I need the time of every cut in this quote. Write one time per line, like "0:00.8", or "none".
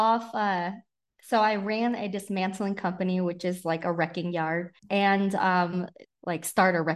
0:04.8
0:06.0